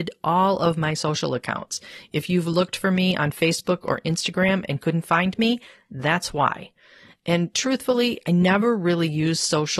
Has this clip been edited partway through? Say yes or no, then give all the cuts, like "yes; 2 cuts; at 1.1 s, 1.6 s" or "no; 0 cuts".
no; 0 cuts